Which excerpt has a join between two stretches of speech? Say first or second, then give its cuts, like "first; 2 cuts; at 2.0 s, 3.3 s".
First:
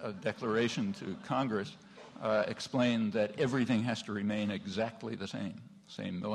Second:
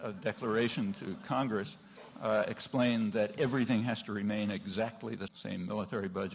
second; 1 cut; at 5.3 s